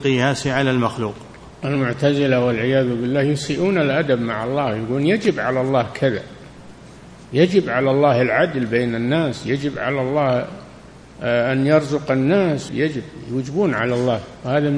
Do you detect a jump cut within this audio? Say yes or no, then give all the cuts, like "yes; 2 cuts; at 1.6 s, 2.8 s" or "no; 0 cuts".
yes; 1 cut; at 12.7 s